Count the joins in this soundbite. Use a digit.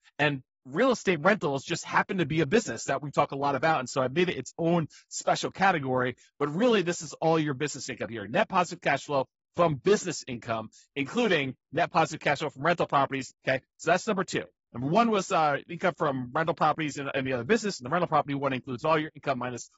2